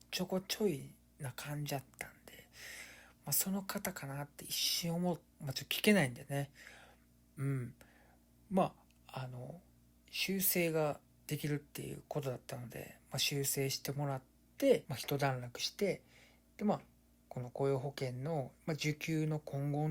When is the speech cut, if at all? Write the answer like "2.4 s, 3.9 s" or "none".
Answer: 5.3 s